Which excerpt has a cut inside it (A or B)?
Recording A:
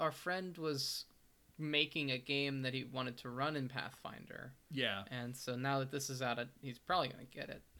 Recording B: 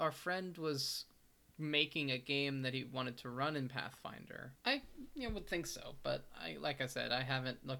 B